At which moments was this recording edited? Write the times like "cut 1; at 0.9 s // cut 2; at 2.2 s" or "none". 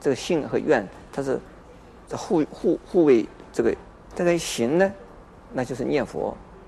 cut 1; at 4.0 s